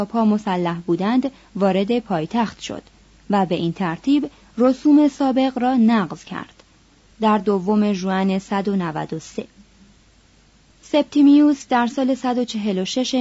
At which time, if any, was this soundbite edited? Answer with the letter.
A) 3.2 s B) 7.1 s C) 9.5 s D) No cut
B